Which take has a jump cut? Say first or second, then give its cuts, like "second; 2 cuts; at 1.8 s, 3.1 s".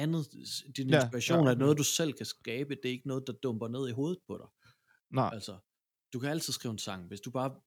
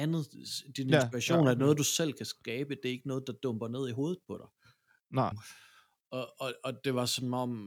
second; 1 cut; at 5.3 s